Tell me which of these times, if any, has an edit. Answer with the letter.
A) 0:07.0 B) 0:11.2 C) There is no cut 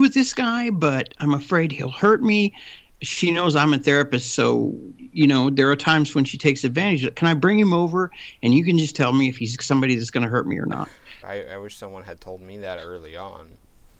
B